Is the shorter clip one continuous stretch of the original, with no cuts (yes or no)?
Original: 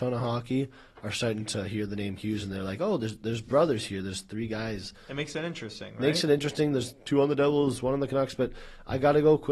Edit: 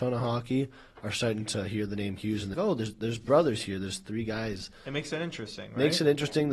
no